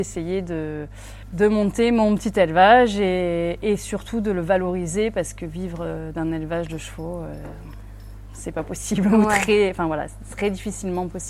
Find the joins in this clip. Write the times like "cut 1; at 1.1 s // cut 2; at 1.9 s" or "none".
none